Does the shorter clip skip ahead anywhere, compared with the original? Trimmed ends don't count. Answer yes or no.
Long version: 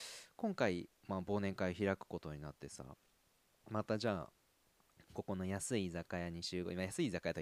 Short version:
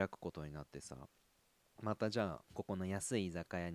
yes